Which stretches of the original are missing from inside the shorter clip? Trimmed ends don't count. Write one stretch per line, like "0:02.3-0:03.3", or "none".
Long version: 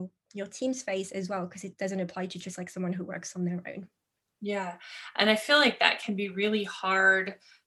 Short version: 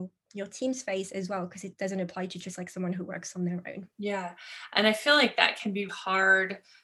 0:03.9-0:04.3
0:06.3-0:06.7

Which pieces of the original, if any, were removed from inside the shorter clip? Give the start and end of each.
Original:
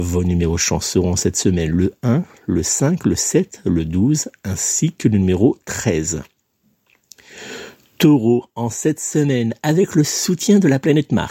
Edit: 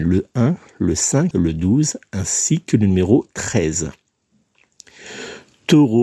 0:03.0-0:03.6

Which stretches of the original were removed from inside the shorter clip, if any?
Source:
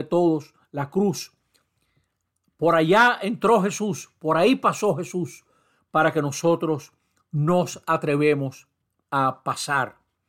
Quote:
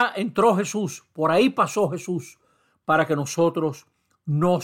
none

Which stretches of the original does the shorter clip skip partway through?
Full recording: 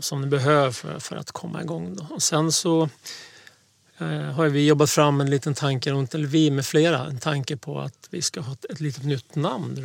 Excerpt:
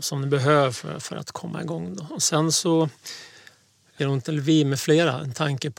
0:04.0-0:05.9

